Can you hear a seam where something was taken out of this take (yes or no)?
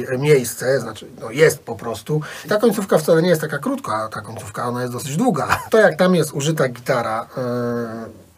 yes